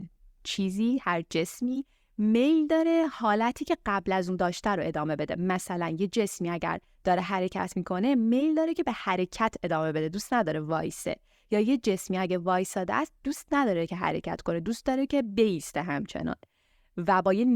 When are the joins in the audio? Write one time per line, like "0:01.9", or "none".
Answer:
none